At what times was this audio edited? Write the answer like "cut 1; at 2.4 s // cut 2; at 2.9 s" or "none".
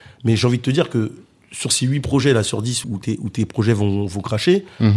cut 1; at 2.8 s